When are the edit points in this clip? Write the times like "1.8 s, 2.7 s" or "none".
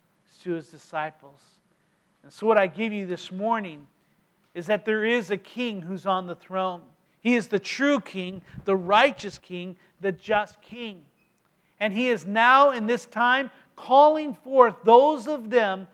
none